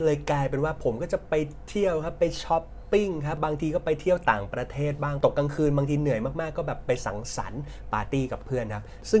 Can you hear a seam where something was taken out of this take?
yes; 1 cut; at 3.4 s

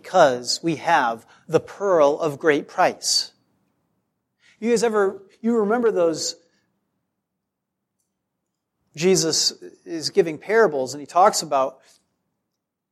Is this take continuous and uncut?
yes; 0 cuts

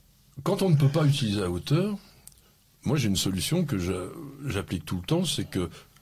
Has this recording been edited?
no; 0 cuts

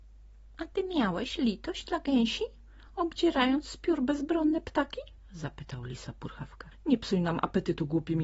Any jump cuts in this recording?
yes; 1 cut; at 6.7 s

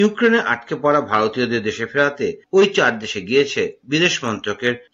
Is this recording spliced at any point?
no; 0 cuts

